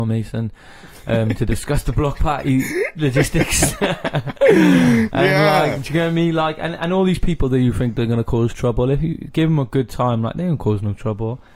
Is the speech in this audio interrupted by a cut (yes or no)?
no